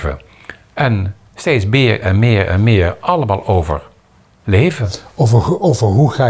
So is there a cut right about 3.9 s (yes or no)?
no